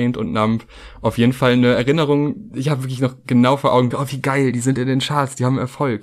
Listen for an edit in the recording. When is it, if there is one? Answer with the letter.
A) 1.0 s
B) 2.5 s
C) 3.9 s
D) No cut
C